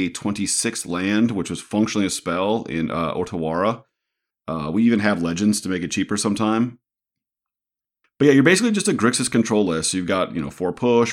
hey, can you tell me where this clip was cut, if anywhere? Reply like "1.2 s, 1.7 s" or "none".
4.3 s